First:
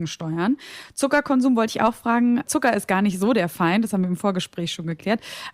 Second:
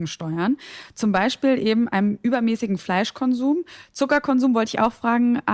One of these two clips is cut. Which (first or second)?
first